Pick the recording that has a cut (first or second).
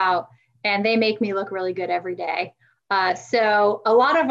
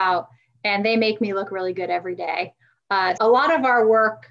second